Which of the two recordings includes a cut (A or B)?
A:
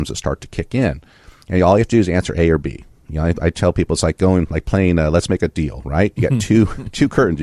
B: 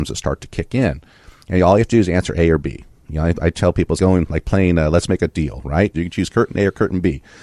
B